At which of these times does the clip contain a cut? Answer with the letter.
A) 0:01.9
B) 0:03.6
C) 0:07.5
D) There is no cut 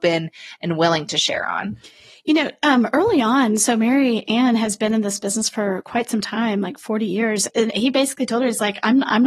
C